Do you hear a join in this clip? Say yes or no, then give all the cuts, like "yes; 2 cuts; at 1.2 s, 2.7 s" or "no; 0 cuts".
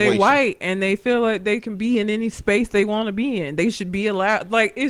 no; 0 cuts